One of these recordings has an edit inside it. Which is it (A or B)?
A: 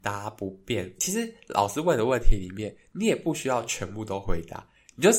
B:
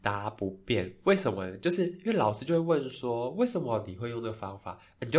A